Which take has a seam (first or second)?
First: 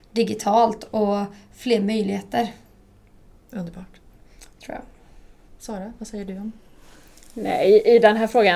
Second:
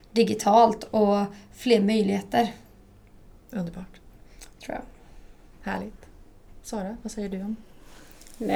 first